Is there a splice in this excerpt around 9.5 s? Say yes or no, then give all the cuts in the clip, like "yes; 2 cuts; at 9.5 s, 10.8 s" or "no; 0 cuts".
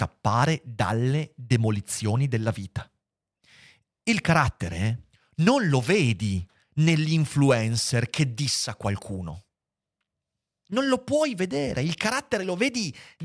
no; 0 cuts